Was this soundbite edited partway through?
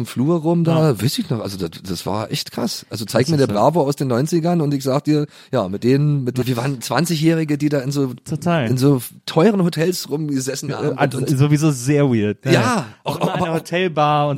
yes; 1 cut; at 6.4 s

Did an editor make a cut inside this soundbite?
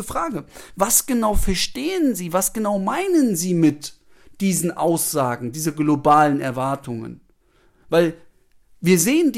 no; 0 cuts

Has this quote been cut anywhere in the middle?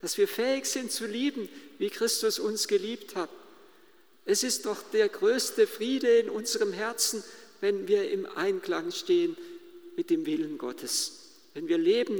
no; 0 cuts

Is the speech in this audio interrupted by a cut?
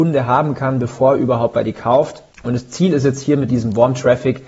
yes; 1 cut; at 2.3 s

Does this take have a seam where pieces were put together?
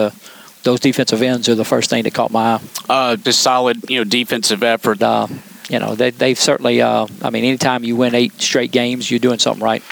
yes; 2 cuts; at 3.2 s, 5.0 s

